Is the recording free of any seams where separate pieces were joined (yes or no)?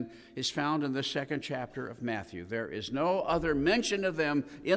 yes